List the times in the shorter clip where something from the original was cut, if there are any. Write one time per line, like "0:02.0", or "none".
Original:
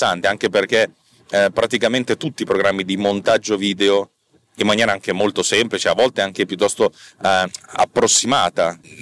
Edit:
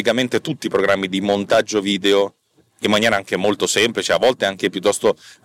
none